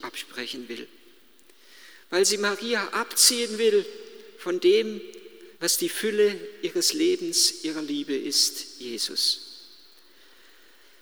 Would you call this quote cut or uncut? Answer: cut